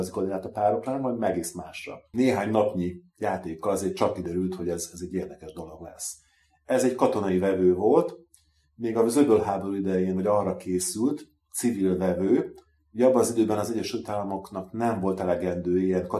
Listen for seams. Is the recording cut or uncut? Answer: uncut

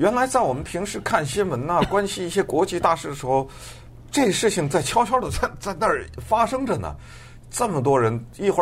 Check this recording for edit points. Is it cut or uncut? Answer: uncut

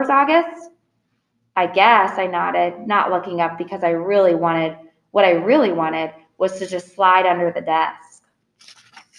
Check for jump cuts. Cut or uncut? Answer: uncut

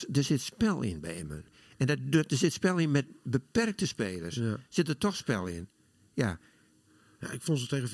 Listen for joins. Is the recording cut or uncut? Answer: uncut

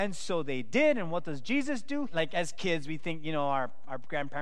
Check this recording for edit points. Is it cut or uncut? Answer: cut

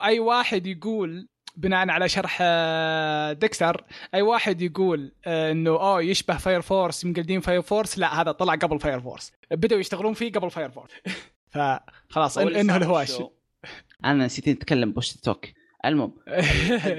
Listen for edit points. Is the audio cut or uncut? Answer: cut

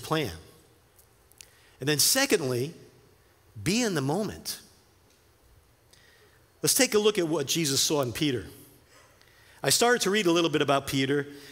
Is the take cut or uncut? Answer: uncut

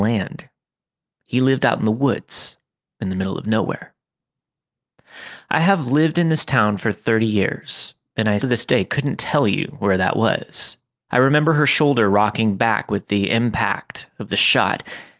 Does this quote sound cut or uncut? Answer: cut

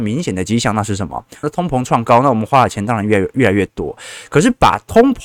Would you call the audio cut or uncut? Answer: cut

